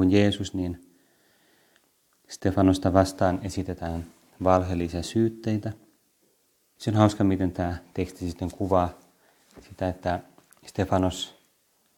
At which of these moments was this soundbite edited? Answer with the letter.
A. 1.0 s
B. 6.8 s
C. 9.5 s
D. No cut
B